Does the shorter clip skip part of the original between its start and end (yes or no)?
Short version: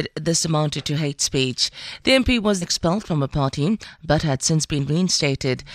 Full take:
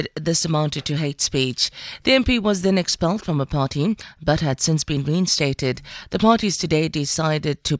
yes